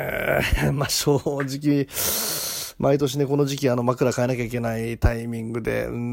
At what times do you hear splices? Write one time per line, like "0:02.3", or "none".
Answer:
none